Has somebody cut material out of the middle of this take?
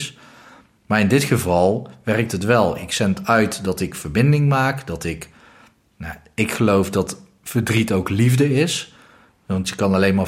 no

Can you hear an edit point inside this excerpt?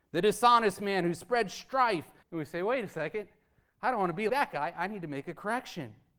yes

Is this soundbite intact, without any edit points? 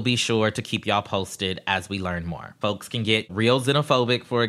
no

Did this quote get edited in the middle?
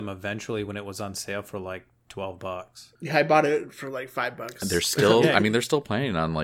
yes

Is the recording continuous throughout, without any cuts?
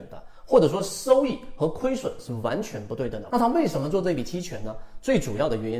no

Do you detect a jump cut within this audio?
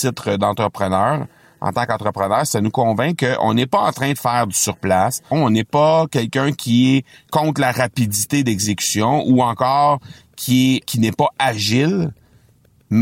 yes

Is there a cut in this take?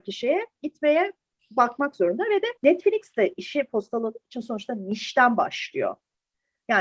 yes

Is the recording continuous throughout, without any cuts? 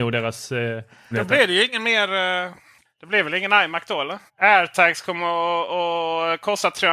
no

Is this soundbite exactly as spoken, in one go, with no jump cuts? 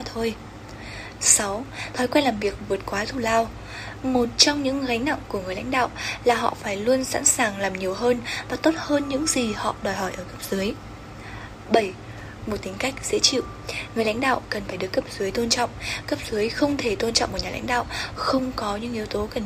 yes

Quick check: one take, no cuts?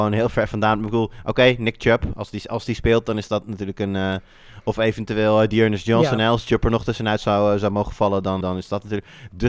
no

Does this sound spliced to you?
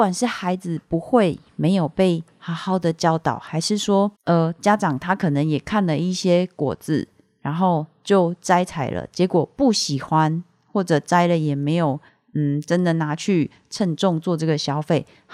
yes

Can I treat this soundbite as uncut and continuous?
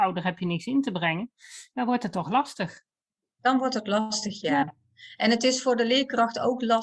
yes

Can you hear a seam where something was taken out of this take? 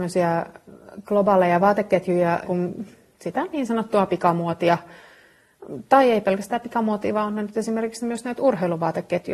yes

